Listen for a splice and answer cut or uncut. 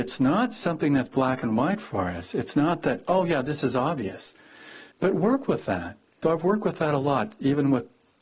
cut